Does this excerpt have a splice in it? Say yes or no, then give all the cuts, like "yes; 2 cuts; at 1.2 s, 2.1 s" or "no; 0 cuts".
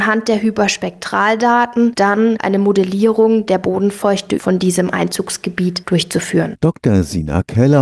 no; 0 cuts